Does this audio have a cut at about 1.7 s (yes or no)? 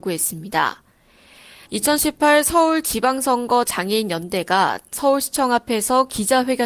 yes